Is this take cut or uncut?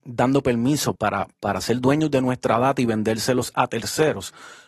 cut